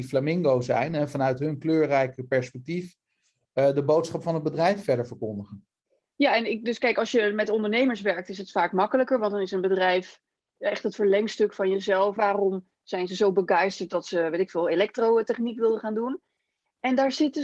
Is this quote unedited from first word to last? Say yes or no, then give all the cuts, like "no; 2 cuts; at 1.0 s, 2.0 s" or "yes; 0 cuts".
no; 1 cut; at 12.2 s